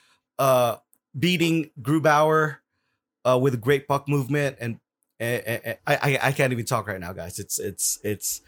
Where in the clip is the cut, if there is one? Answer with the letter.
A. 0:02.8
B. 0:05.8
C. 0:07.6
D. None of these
B